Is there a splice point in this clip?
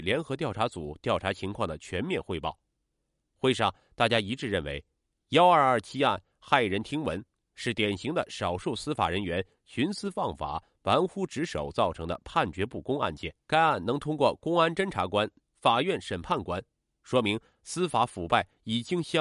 yes; 2 cuts; at 13.4 s, 15.4 s

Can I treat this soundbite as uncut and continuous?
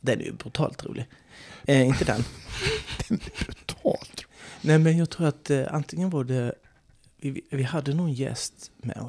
yes; 0 cuts

